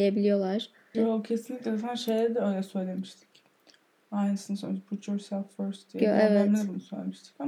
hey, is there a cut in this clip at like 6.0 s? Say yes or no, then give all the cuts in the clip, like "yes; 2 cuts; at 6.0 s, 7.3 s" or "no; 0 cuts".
no; 1 cut; at 0.9 s